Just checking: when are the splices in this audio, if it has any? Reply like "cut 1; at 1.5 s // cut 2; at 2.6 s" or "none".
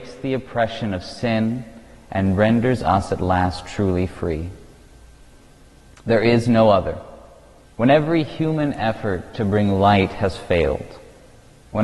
cut 1; at 5.9 s // cut 2; at 7.6 s